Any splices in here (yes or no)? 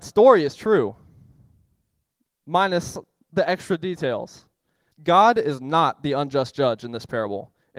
yes